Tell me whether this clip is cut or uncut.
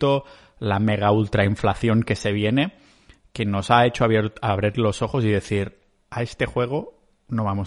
uncut